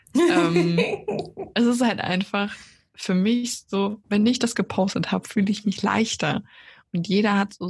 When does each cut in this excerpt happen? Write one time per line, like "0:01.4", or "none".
none